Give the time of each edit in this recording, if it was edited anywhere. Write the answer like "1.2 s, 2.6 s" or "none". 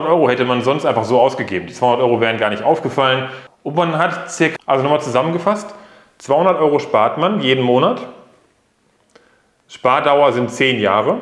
3.5 s, 4.6 s